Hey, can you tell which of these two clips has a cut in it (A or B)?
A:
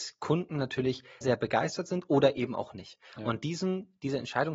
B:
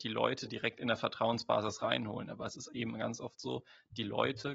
A